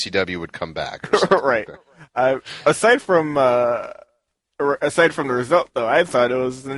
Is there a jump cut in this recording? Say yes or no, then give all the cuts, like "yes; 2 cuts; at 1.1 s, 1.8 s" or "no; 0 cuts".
no; 0 cuts